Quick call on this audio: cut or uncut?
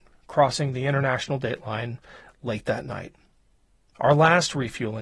uncut